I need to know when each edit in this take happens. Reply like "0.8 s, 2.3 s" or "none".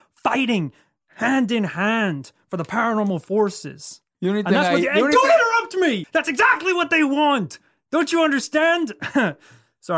6.0 s

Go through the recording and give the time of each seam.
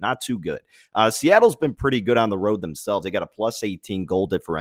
none

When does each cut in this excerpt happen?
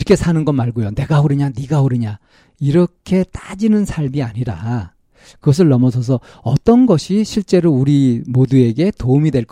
none

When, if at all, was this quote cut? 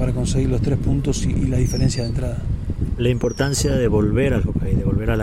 none

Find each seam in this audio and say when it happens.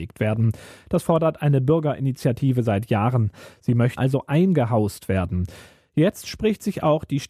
4.0 s

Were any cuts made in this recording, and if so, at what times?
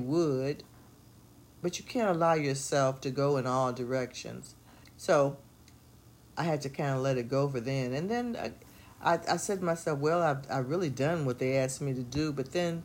4.8 s

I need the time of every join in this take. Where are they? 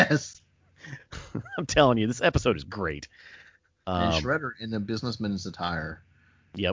3.8 s

